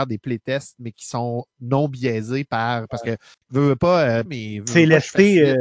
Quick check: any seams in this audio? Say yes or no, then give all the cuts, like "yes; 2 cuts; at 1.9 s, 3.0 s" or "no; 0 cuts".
yes; 1 cut; at 4.3 s